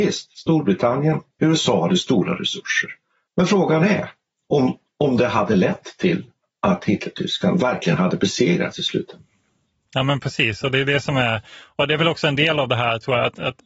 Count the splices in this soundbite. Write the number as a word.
one